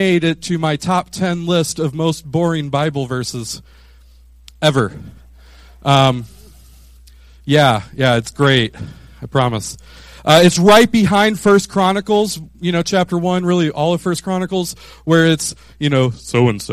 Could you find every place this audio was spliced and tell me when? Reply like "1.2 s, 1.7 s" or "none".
none